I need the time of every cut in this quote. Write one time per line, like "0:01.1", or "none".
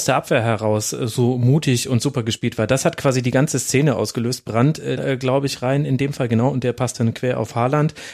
0:05.0